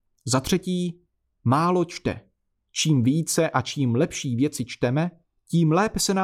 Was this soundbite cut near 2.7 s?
yes; 1 cut; at 2.7 s

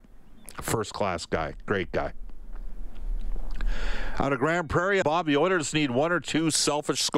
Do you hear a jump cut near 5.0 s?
yes; 1 cut; at 5.0 s

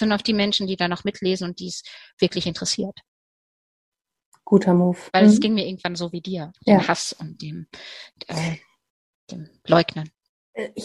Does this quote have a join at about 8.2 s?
no; 2 cuts; at 5.1 s, 6.5 s

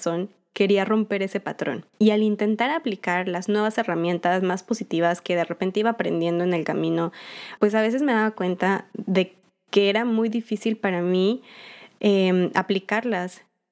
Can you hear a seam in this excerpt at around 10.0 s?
no; 2 cuts; at 1.9 s, 7.6 s

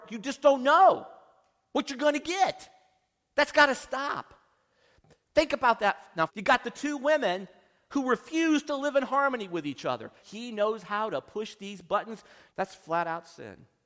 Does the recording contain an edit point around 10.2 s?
yes; 3 cuts; at 6.3 s, 10.2 s, 12.5 s

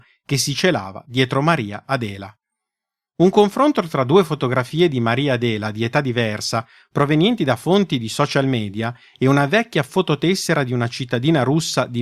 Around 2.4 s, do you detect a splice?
no; 0 cuts

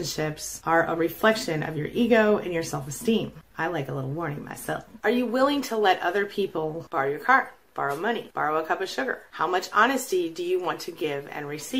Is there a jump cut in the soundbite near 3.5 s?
yes; 1 cut; at 3.5 s

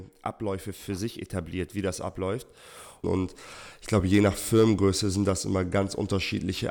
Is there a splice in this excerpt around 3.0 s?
yes; 1 cut; at 3.0 s

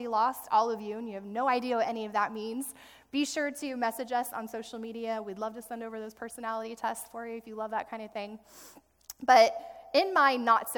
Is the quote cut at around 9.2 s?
no; 0 cuts

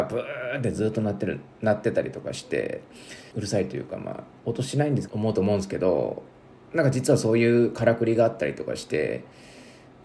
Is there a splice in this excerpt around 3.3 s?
yes; 2 cuts; at 3.3 s, 5.1 s

